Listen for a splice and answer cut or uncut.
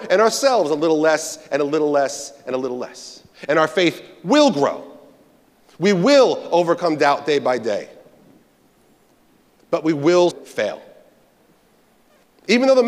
cut